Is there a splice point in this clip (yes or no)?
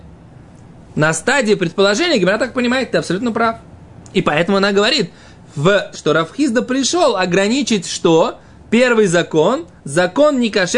yes